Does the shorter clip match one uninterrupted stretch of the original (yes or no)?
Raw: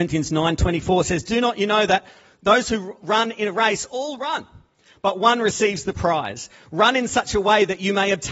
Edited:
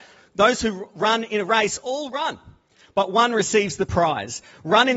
yes